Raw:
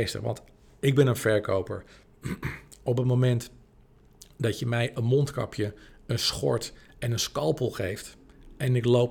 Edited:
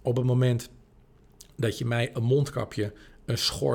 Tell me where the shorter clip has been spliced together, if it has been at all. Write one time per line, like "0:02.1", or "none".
none